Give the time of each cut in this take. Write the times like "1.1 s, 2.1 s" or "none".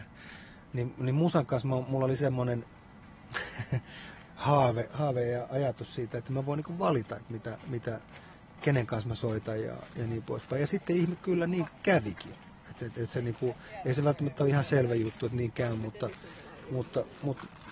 none